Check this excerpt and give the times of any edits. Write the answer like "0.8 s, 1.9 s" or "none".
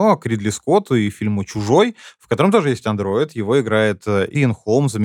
none